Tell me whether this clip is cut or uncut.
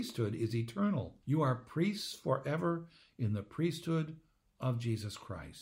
cut